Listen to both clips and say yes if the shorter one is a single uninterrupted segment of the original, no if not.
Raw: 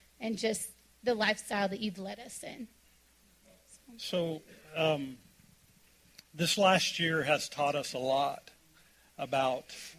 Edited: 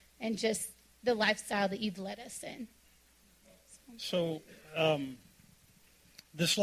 yes